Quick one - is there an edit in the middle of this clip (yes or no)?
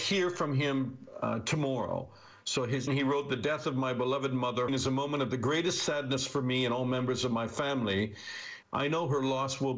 yes